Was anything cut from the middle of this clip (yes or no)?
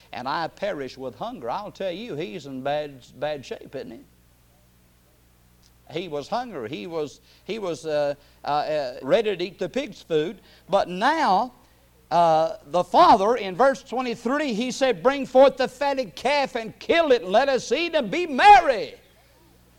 yes